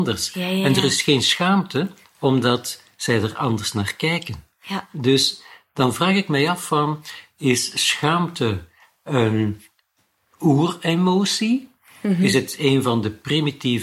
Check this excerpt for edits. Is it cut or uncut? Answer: uncut